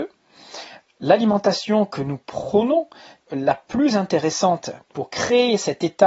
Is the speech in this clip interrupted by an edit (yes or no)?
yes